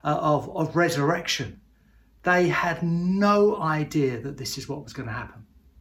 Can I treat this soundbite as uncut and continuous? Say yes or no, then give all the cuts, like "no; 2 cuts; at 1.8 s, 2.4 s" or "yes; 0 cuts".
yes; 0 cuts